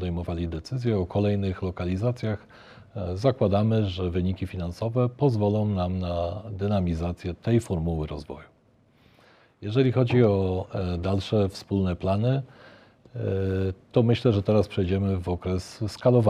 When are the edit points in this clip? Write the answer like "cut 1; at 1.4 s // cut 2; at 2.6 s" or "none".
none